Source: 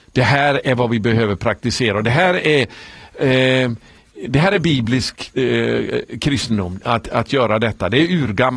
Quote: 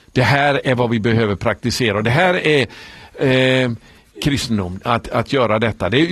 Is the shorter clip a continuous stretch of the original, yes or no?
no